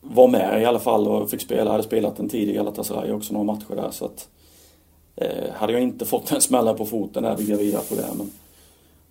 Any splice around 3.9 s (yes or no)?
no